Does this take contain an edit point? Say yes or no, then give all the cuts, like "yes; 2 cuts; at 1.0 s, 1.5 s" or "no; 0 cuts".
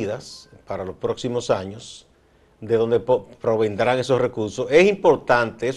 no; 0 cuts